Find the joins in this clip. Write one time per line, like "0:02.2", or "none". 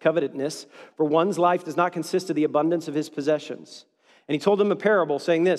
none